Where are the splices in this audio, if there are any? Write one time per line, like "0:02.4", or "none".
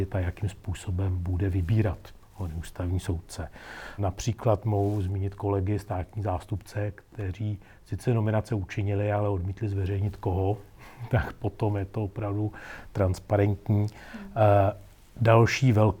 0:04.0

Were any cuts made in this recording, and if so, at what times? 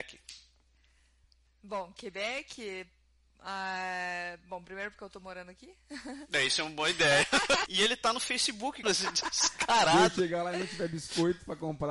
0:07.7
0:08.8

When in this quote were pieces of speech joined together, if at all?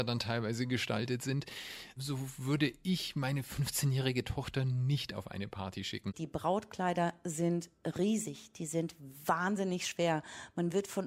0:06.1

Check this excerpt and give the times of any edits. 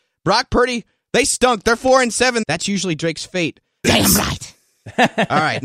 0:02.4
0:03.8

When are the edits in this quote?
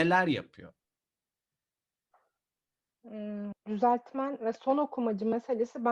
0:03.5

